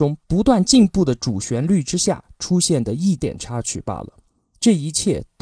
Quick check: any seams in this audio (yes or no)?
yes